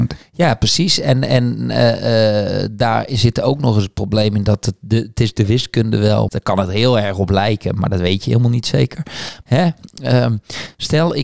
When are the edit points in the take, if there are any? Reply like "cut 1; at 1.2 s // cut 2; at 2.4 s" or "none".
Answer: cut 1; at 6.3 s // cut 2; at 9.4 s